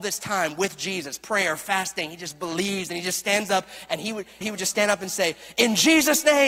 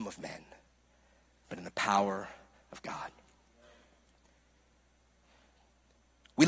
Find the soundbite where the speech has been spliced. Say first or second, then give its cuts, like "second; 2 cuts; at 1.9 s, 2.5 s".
first; 1 cut; at 4.4 s